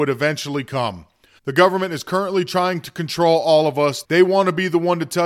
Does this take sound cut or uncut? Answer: cut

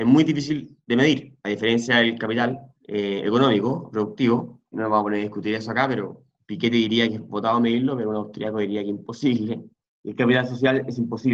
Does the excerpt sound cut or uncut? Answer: cut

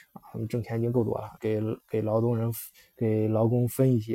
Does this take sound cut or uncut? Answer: cut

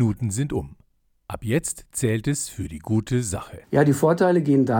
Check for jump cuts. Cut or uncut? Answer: cut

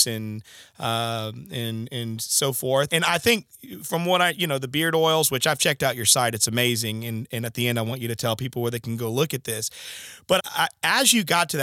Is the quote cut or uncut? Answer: cut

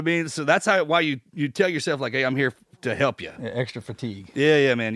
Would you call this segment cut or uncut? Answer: uncut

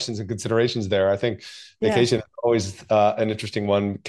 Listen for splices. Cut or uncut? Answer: uncut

